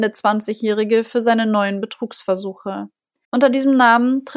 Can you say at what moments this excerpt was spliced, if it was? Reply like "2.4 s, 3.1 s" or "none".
3.2 s